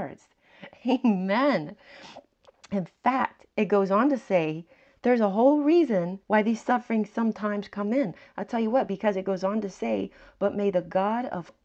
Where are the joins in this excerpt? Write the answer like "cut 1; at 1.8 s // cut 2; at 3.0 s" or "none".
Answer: cut 1; at 6.2 s